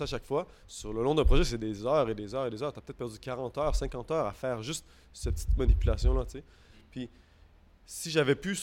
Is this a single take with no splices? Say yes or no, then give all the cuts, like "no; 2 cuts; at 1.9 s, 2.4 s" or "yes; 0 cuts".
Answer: yes; 0 cuts